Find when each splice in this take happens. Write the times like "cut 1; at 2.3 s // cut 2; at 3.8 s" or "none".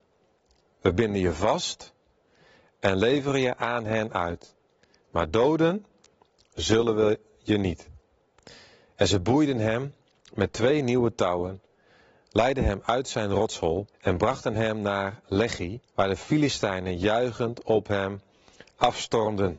cut 1; at 13.9 s // cut 2; at 15.9 s